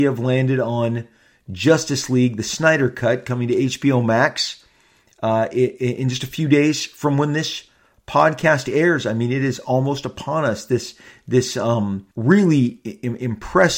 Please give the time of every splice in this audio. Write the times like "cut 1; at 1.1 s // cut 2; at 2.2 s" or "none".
cut 1; at 12.1 s